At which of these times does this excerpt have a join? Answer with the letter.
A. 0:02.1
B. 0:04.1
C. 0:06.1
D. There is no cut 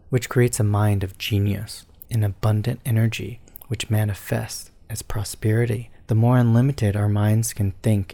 A